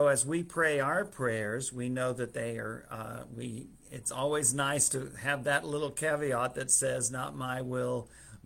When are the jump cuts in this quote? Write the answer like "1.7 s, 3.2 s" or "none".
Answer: none